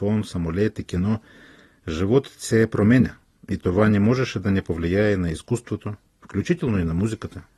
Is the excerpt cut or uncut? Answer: uncut